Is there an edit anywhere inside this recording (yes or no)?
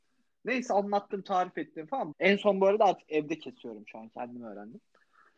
yes